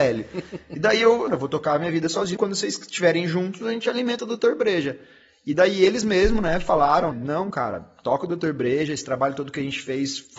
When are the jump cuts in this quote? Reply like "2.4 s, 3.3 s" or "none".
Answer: 1.3 s, 2.4 s, 7.1 s